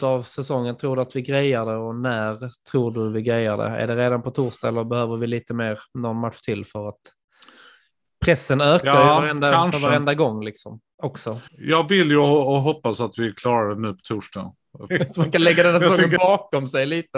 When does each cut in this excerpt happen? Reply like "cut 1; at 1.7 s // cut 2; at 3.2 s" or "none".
cut 1; at 11.5 s // cut 2; at 14.9 s